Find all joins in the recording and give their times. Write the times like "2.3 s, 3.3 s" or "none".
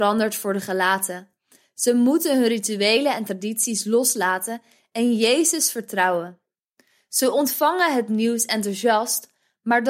none